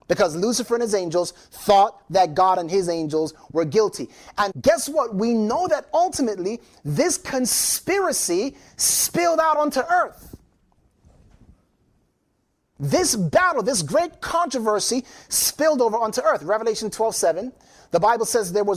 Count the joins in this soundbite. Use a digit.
1